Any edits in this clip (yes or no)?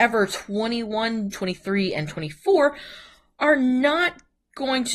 yes